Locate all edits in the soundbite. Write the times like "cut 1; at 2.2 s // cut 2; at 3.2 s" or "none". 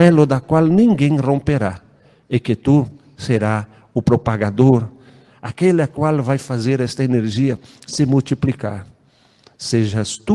none

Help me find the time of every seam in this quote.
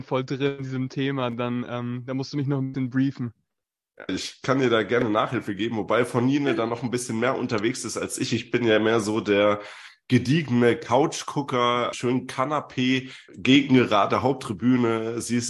cut 1; at 4.1 s // cut 2; at 11.9 s // cut 3; at 13.3 s

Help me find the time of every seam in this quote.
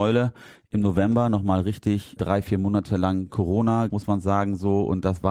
cut 1; at 3.9 s

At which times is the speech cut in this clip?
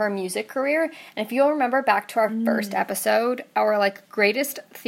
none

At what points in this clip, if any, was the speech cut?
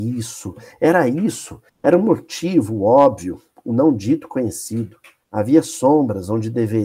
cut 1; at 1.7 s // cut 2; at 5.2 s

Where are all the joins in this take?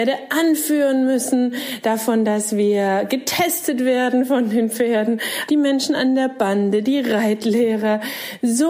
cut 1; at 5.5 s // cut 2; at 6.8 s

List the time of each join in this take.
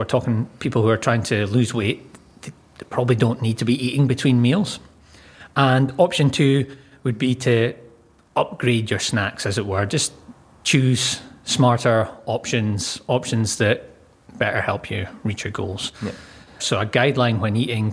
cut 1; at 16.6 s

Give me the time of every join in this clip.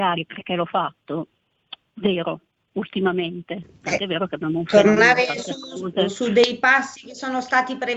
cut 1; at 1.8 s

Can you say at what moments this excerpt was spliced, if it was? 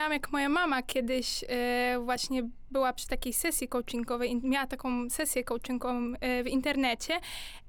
none

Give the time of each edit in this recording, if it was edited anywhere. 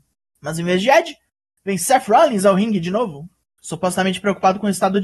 none

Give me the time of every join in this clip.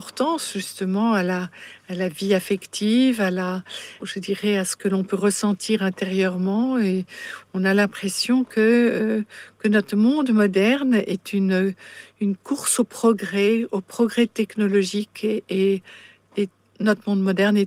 cut 1; at 4.0 s

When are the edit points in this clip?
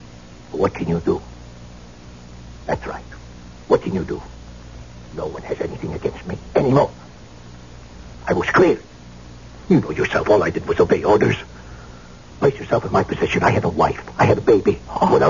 cut 1; at 5.1 s

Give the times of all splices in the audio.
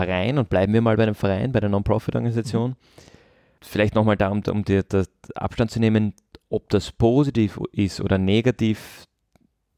cut 1; at 3.6 s

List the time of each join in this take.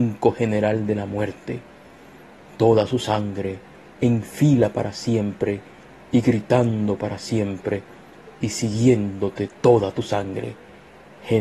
cut 1; at 9.5 s

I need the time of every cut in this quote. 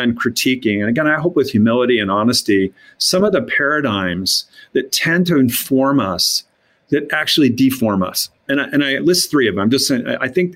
none

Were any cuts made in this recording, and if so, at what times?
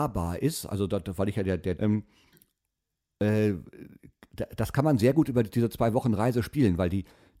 cut 1; at 1.8 s

